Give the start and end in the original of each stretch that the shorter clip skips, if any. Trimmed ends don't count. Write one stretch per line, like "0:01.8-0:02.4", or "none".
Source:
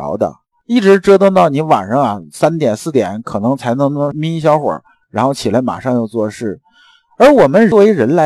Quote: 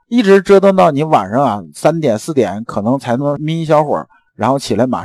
0:03.8-0:03.9